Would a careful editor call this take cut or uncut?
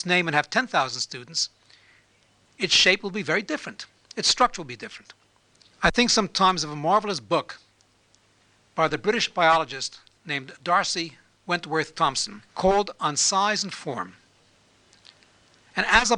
cut